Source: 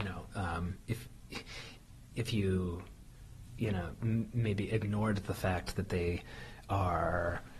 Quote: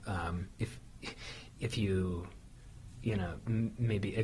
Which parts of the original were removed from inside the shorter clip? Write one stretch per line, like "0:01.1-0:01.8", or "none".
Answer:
0:01.8-0:02.1